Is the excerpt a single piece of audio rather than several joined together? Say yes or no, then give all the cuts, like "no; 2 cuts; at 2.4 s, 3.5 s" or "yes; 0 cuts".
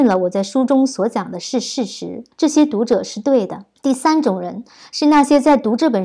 no; 2 cuts; at 2.3 s, 3.8 s